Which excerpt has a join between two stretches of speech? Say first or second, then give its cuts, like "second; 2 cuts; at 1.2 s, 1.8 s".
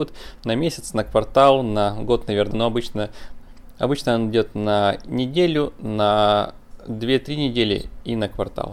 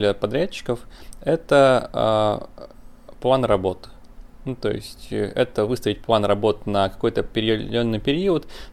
first; 1 cut; at 2.5 s